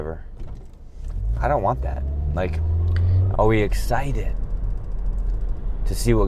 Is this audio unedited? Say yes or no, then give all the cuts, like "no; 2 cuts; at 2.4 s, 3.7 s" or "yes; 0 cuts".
no; 1 cut; at 3.3 s